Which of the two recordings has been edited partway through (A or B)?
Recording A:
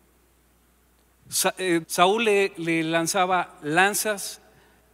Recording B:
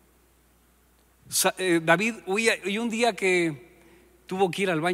A